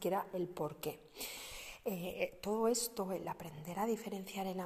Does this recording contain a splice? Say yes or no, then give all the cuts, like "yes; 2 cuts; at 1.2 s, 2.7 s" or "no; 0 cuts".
no; 0 cuts